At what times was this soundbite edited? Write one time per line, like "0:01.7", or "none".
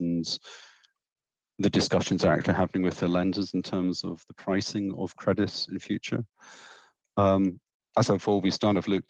0:07.8